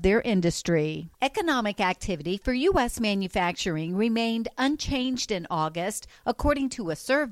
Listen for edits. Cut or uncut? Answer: cut